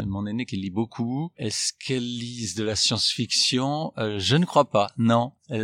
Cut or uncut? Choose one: uncut